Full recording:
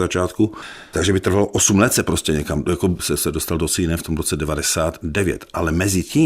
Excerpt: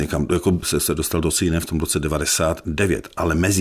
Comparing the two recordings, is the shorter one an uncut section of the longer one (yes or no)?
yes